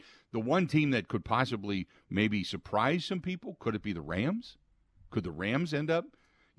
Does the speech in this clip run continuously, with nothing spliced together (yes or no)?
yes